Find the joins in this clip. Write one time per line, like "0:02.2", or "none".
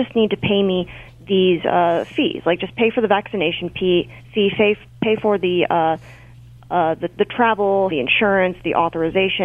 0:07.9